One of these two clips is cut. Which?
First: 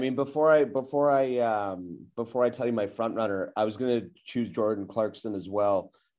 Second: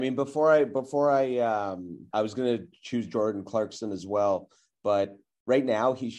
second; 1 cut; at 2.1 s

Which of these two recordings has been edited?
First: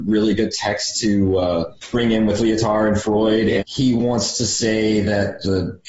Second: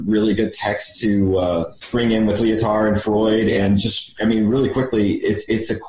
first; 1 cut; at 3.6 s

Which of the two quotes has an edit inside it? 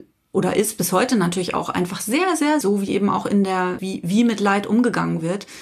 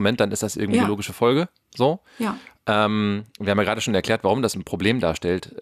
first; 2 cuts; at 2.6 s, 3.8 s

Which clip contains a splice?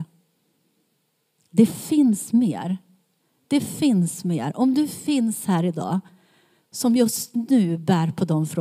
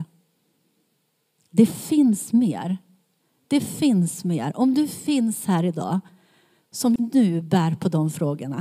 second; 1 cut; at 7.0 s

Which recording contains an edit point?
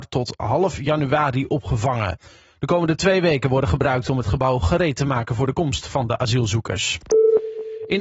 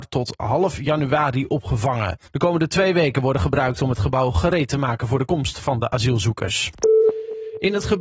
second; 1 cut; at 2.3 s

